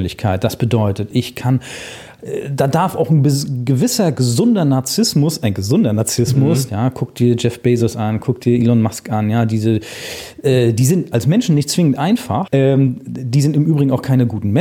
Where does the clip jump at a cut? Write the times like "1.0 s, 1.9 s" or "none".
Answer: 1.1 s, 6.7 s